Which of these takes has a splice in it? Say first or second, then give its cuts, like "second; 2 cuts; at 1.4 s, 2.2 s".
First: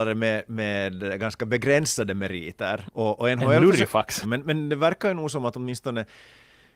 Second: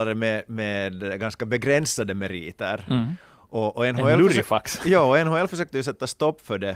first; 2 cuts; at 2.8 s, 4.2 s